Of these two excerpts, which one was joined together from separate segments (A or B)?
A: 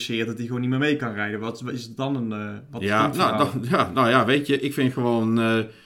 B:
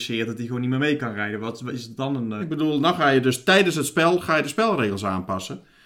B